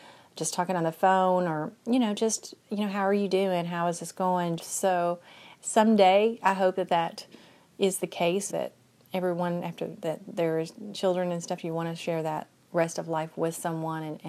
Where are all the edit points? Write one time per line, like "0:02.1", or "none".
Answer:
0:04.6
0:08.5